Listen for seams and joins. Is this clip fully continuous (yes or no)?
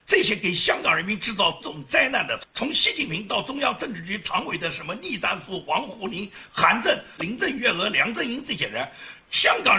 no